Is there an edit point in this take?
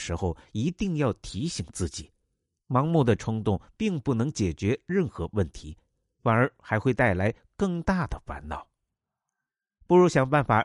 no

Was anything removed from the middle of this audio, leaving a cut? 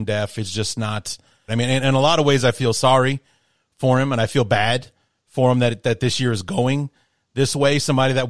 yes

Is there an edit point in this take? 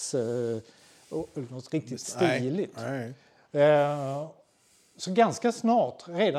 no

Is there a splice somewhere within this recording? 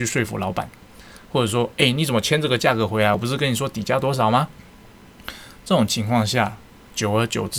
no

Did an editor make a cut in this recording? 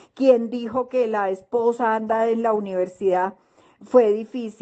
no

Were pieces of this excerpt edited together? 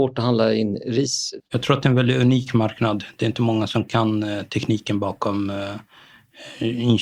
yes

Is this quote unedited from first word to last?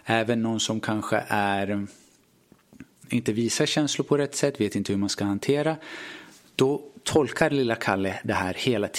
yes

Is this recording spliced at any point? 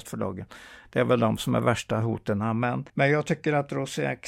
yes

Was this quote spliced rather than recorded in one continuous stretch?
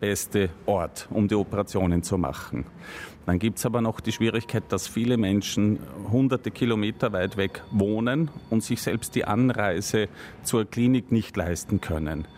no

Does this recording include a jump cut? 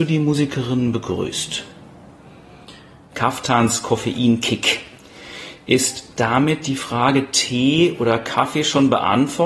yes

